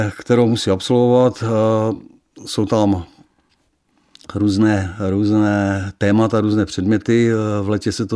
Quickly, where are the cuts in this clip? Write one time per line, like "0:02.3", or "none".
none